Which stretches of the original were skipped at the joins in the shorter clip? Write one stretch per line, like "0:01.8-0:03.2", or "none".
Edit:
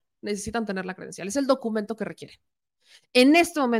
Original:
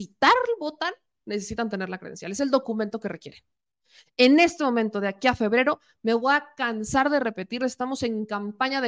none